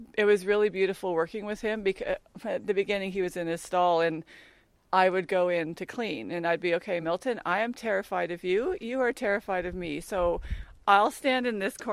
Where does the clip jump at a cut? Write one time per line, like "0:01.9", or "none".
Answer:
none